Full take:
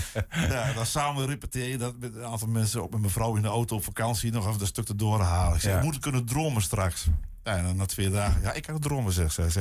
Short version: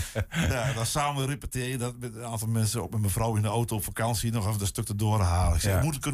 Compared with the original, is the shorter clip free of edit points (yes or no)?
yes